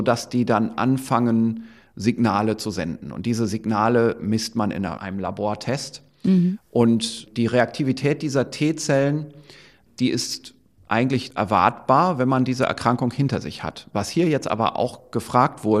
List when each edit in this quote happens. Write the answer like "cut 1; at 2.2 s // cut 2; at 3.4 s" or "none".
none